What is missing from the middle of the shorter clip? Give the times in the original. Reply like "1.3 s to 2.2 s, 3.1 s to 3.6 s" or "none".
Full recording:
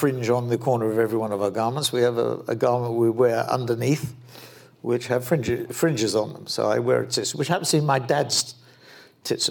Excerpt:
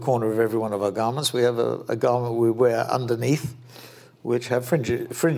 none